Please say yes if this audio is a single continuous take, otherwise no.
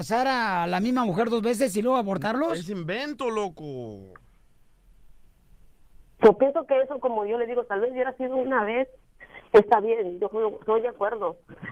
yes